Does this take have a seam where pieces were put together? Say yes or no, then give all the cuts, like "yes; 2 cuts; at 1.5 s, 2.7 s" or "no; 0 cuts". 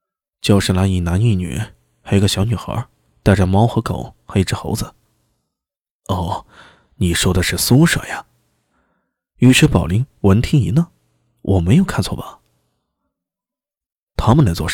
no; 0 cuts